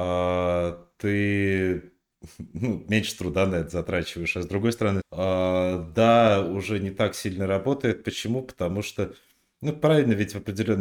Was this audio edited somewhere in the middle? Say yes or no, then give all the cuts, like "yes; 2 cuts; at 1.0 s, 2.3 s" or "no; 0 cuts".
yes; 1 cut; at 5.0 s